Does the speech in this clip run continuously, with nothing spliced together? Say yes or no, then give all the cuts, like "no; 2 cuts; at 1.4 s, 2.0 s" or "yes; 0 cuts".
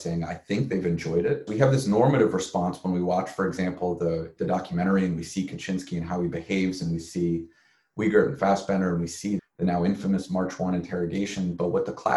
no; 3 cuts; at 1.5 s, 4.4 s, 9.4 s